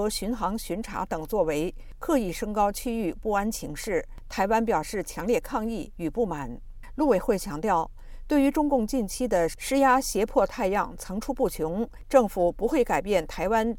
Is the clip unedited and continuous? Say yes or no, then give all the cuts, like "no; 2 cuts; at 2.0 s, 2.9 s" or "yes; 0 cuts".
yes; 0 cuts